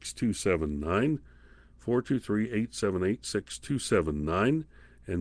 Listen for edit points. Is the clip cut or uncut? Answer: uncut